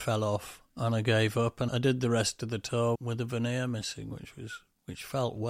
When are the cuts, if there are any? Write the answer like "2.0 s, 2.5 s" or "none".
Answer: 1.7 s, 2.9 s